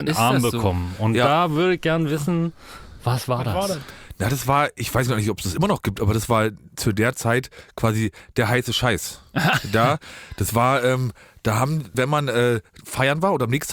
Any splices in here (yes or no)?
yes